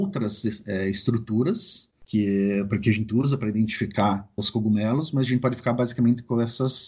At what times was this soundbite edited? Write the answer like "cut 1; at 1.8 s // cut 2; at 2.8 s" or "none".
cut 1; at 4.4 s